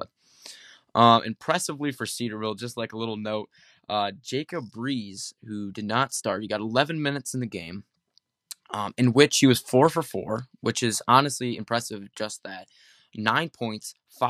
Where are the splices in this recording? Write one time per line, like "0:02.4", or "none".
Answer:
none

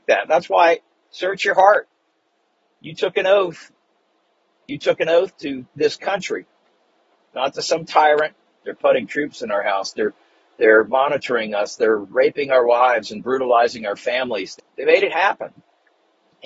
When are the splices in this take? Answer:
0:01.0
0:08.6
0:14.6

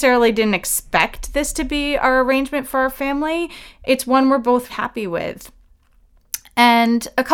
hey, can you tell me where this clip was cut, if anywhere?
0:04.7

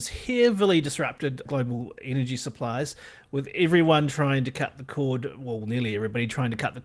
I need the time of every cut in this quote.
0:01.5

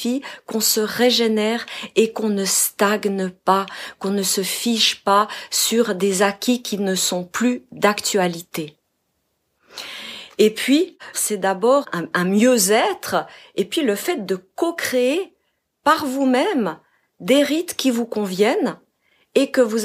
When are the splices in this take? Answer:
0:11.1

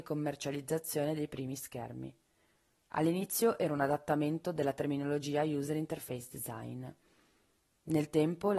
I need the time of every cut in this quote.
none

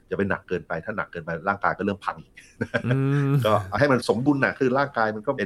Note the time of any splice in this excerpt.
none

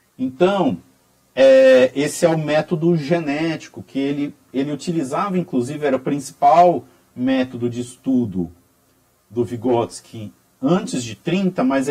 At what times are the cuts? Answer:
none

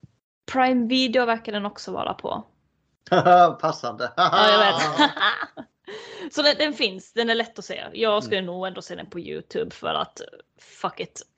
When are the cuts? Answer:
none

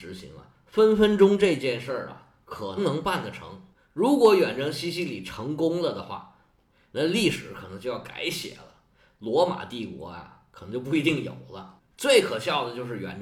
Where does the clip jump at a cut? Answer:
0:02.8
0:11.9

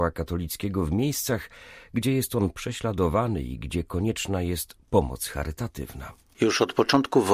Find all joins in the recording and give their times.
none

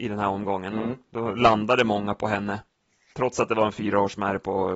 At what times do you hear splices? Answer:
none

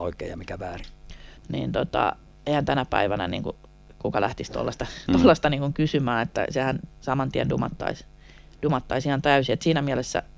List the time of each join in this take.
0:01.4

